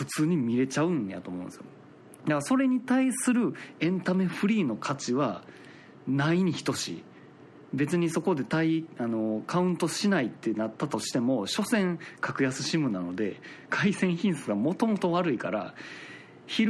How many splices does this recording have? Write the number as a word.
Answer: zero